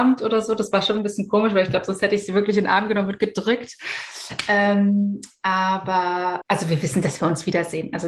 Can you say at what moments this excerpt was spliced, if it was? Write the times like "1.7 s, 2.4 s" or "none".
6.4 s